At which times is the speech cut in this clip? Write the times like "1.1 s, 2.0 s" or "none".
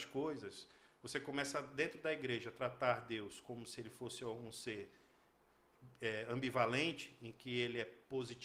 none